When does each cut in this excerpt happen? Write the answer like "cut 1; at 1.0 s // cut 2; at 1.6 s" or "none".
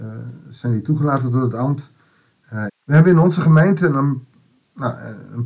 cut 1; at 2.7 s